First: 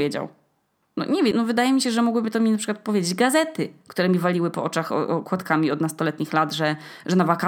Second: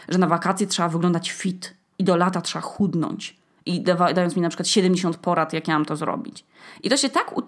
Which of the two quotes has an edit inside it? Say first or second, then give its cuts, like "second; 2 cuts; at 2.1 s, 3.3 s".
first; 1 cut; at 1.3 s